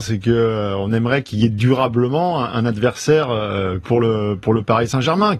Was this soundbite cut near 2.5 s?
no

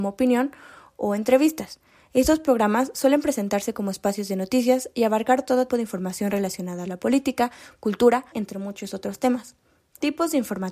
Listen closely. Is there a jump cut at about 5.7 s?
yes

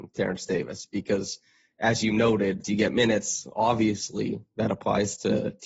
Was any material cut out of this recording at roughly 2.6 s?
yes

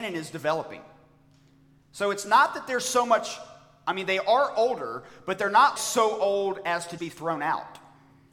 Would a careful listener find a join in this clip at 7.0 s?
yes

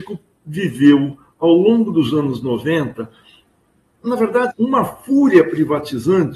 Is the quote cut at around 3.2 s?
no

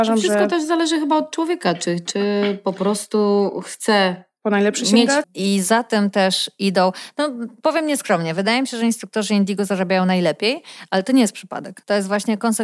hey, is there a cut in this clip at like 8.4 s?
no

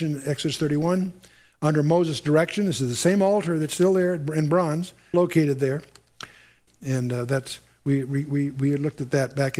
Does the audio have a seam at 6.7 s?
yes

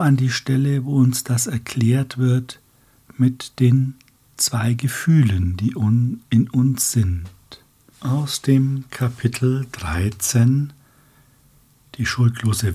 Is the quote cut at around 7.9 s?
yes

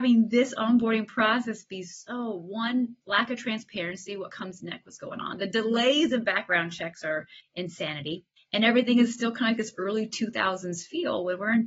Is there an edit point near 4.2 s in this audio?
no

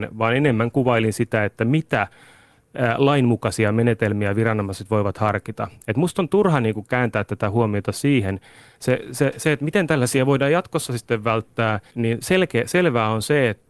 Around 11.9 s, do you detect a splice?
yes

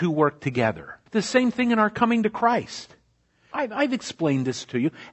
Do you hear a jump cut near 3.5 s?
yes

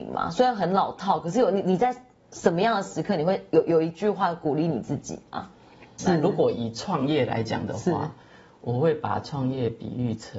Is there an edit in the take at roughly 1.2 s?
no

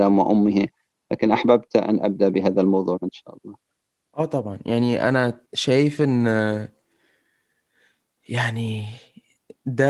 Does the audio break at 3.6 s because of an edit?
no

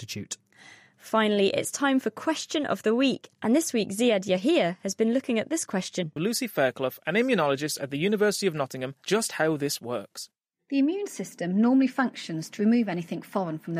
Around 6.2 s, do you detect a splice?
yes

